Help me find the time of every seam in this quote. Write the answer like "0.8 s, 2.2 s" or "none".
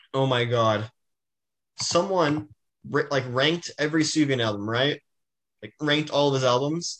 1.6 s